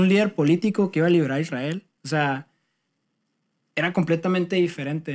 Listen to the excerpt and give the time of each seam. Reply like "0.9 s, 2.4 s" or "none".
2.0 s